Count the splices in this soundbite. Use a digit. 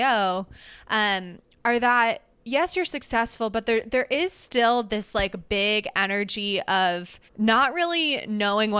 2